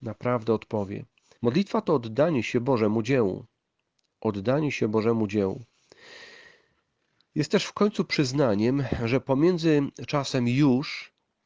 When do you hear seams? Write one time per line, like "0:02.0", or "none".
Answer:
0:01.4